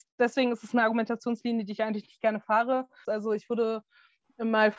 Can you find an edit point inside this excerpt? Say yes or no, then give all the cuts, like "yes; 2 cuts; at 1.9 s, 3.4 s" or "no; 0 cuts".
yes; 1 cut; at 3.0 s